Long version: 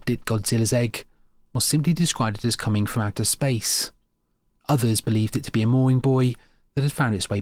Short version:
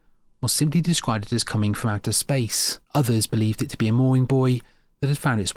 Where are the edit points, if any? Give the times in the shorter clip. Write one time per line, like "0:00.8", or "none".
0:02.8